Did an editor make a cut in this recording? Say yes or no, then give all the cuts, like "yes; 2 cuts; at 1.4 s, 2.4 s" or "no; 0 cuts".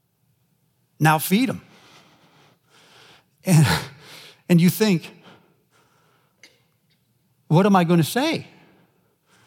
no; 0 cuts